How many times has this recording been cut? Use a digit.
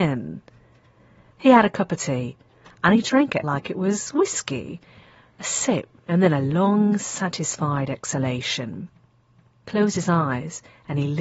1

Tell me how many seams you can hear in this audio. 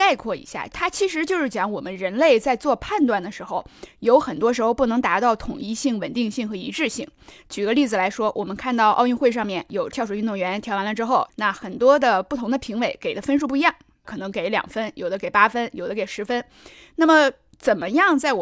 1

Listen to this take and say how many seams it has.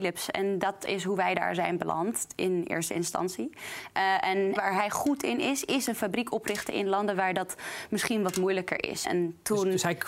2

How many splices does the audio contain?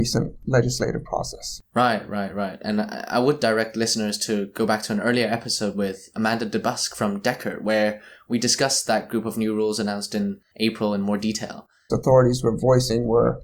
1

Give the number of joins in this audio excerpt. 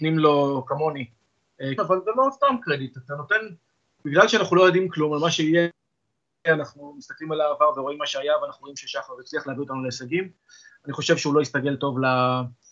1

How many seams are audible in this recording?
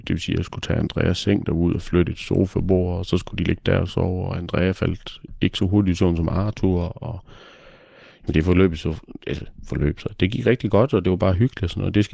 0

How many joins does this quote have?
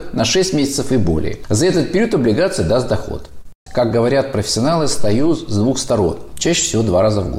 2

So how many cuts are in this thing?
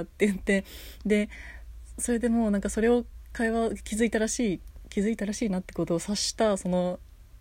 0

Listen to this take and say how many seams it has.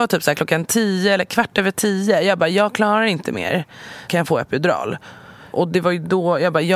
1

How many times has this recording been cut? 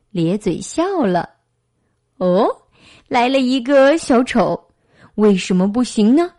1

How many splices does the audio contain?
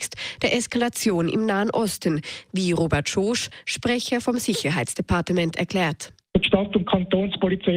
0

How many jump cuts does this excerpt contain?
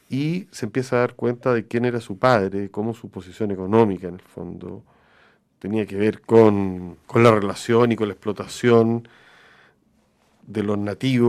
1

